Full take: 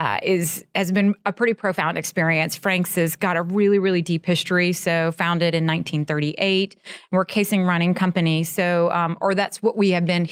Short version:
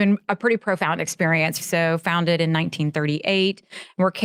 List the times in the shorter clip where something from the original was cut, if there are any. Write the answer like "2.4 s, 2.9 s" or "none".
1.6 s